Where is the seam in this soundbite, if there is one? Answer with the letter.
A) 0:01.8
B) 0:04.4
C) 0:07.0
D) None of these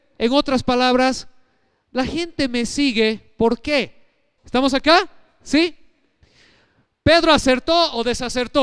B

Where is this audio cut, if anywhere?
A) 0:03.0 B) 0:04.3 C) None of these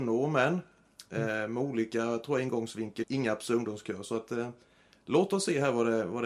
A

